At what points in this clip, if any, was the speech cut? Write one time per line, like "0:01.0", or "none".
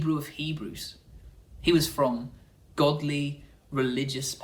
none